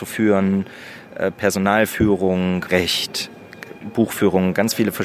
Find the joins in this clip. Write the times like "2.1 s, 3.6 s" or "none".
2.7 s

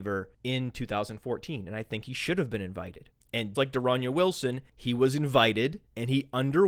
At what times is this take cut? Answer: 3.5 s

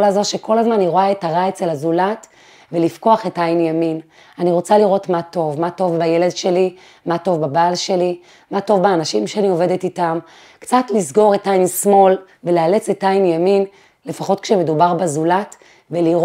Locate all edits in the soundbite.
12.4 s, 13.9 s

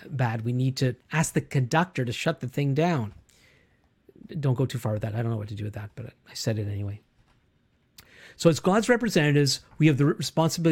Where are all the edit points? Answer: 1.0 s

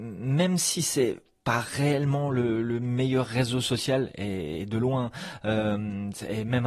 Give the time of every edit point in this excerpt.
none

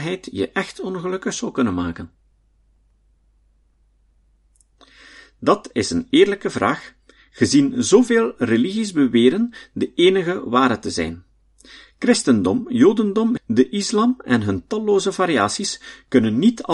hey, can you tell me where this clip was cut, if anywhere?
13.4 s

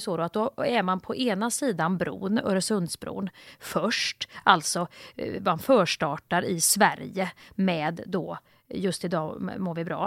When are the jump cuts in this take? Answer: none

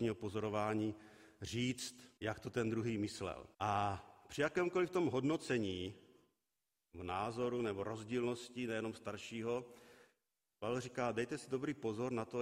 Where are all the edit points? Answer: 2.2 s, 3.5 s

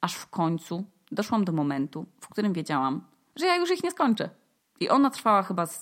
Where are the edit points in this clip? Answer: 4.6 s

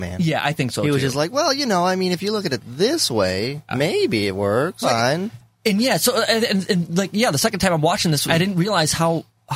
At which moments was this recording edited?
3.7 s, 4.8 s, 8.3 s

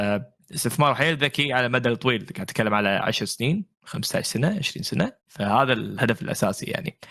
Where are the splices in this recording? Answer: 5.2 s

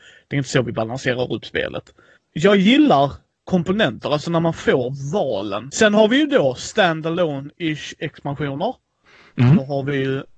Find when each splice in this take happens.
5.7 s

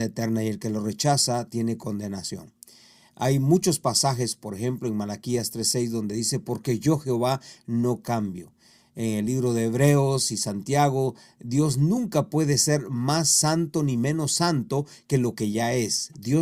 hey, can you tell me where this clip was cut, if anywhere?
none

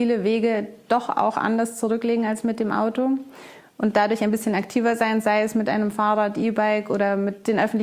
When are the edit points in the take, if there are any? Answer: none

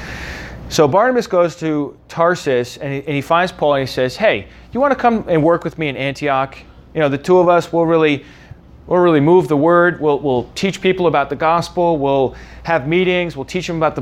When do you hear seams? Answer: none

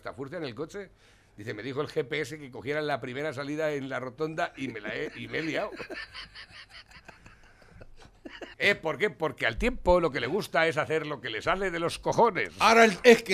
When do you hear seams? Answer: 8.5 s

